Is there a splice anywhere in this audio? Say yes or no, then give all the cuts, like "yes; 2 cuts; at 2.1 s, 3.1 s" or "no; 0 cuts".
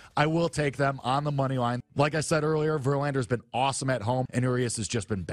yes; 2 cuts; at 1.8 s, 4.3 s